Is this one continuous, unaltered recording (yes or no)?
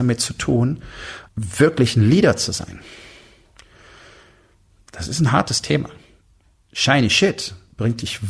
no